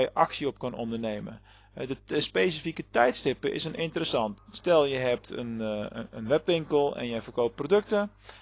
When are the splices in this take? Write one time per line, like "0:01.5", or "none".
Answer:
0:04.4